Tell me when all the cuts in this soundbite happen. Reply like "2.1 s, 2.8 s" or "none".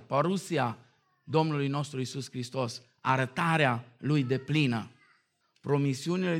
5.4 s